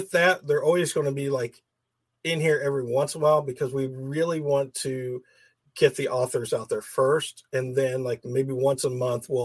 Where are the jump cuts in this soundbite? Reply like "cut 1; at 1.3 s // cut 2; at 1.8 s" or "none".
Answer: none